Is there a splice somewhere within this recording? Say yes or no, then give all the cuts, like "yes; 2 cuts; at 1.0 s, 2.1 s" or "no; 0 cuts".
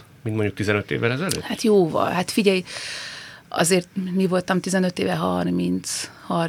no; 0 cuts